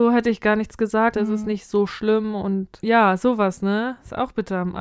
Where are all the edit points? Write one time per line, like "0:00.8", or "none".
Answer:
0:01.1